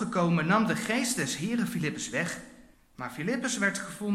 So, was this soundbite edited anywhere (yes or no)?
yes